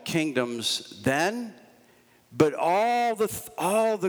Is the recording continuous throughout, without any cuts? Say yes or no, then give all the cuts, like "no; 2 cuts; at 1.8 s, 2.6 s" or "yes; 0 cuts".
yes; 0 cuts